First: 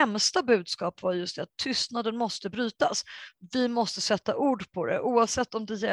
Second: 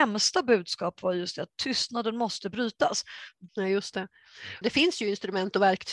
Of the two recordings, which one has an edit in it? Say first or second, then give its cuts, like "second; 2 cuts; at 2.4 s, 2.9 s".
second; 2 cuts; at 3.5 s, 4.6 s